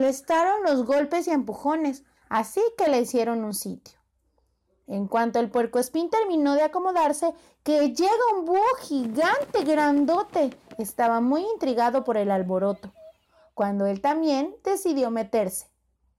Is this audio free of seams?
no; 1 cut; at 2.2 s

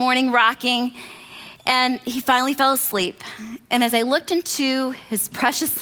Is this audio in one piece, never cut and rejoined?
yes; 0 cuts

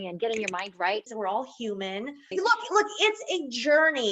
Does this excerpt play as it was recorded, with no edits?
no; 2 cuts; at 1.1 s, 2.3 s

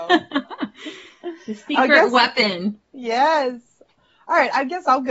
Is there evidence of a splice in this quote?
no; 0 cuts

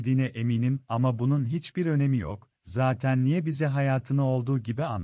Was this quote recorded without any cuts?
yes; 0 cuts

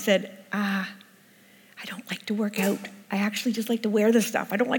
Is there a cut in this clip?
no; 0 cuts

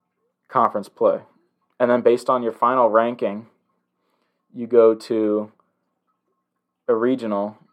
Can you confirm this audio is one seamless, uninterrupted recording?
yes; 0 cuts

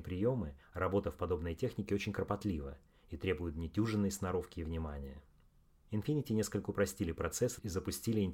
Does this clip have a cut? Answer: no; 0 cuts

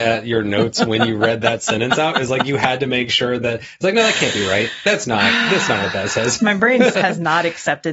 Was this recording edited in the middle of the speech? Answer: yes; 1 cut; at 6.9 s

